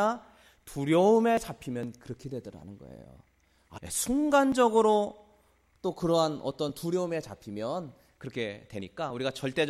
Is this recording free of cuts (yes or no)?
no